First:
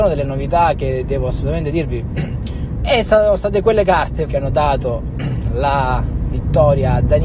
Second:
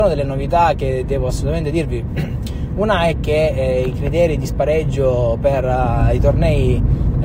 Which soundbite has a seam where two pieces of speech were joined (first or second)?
first